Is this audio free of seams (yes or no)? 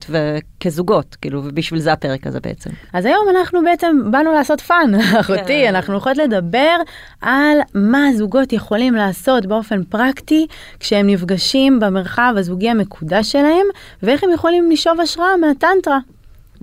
no